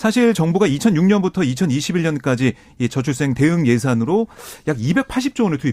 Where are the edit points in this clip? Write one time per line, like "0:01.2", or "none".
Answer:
none